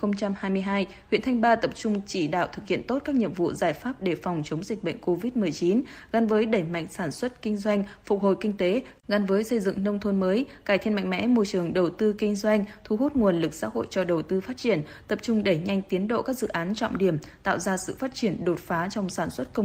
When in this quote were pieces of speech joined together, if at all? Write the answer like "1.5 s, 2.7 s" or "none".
9.0 s